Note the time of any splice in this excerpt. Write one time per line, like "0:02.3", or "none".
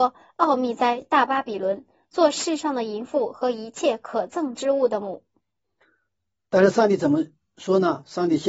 none